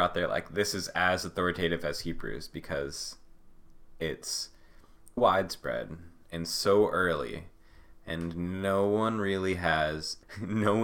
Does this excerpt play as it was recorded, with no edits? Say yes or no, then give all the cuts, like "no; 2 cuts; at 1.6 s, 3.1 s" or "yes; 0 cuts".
no; 1 cut; at 5.2 s